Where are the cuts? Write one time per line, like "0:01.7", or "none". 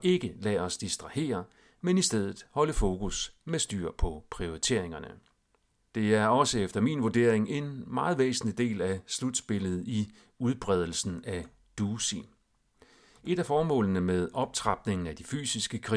0:05.8